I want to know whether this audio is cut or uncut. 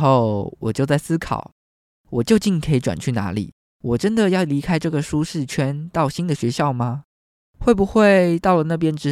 cut